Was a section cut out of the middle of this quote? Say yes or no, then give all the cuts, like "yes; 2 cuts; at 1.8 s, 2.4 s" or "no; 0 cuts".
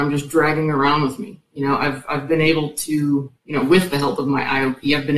yes; 1 cut; at 3.4 s